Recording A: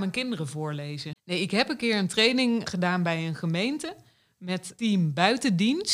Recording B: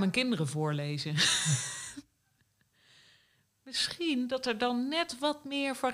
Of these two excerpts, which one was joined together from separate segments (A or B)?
A